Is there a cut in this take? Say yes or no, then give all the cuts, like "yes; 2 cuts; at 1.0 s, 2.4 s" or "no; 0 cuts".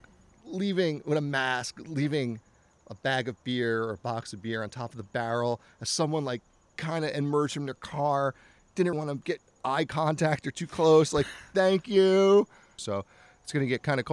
yes; 2 cuts; at 8.9 s, 12.8 s